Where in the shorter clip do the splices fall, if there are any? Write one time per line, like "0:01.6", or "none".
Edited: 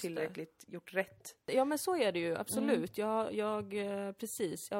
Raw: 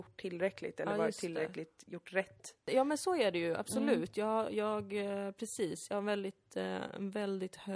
none